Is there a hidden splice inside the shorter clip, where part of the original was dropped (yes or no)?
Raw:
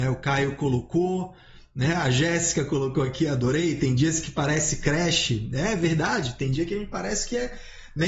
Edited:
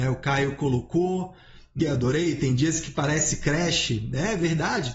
yes